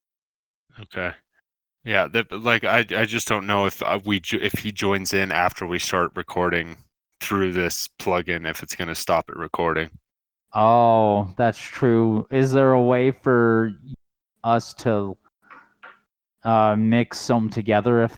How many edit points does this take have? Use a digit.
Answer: 0